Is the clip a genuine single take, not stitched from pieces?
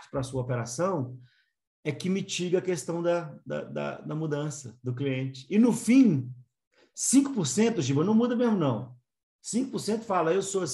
yes; 0 cuts

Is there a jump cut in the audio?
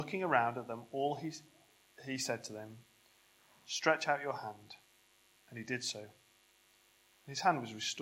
no; 0 cuts

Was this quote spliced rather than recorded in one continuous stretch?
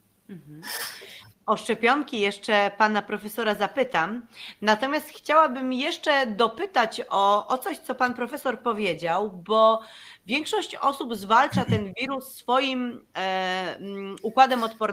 no; 0 cuts

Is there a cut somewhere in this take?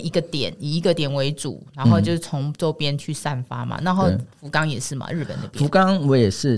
no; 0 cuts

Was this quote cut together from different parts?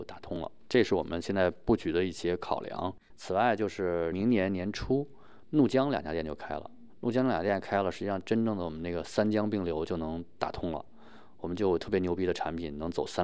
no; 0 cuts

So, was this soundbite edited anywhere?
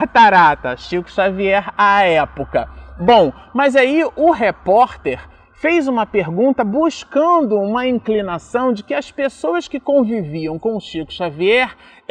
no; 0 cuts

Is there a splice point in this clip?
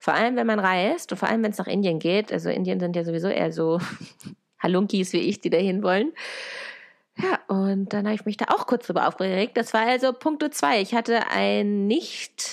no; 0 cuts

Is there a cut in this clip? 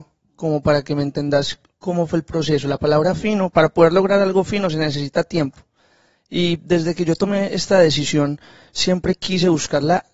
no; 0 cuts

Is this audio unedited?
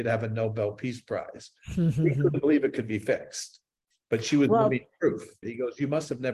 no; 1 cut; at 5.4 s

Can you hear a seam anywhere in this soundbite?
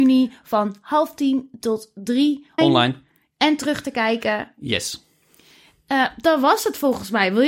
yes; 1 cut; at 2.6 s

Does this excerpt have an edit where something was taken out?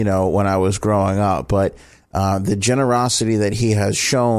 no; 0 cuts

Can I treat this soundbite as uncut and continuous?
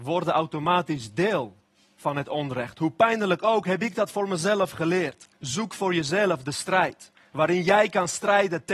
no; 1 cut; at 5.3 s

